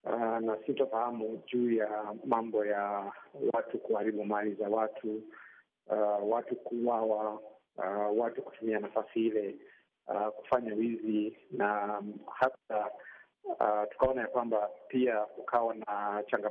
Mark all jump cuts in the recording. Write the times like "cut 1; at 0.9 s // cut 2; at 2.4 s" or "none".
none